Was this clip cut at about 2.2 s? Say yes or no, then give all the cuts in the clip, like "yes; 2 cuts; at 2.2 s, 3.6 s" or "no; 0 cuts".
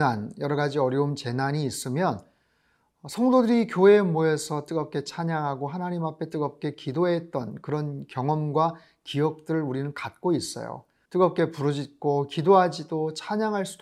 no; 1 cut; at 11.1 s